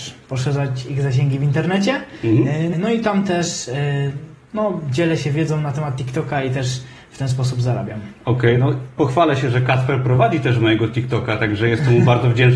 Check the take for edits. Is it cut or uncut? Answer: cut